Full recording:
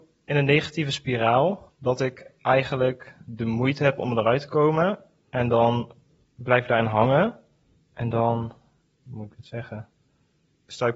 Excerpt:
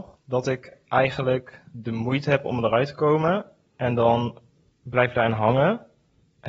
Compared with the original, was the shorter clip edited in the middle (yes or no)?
no